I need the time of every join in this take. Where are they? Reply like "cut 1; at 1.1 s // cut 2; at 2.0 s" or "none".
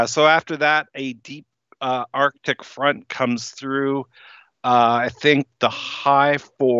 none